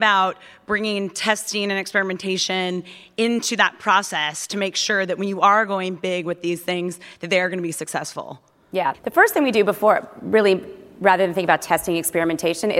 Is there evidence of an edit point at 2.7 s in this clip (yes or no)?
no